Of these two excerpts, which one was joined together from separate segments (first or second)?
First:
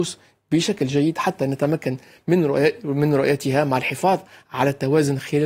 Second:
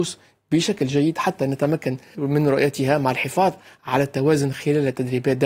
second